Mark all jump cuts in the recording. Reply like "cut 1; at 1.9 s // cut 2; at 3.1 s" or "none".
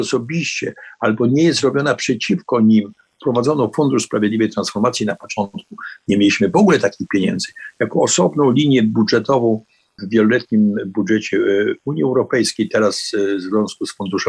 none